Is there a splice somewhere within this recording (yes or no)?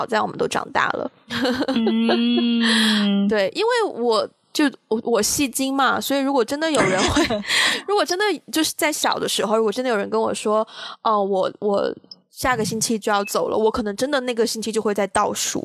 no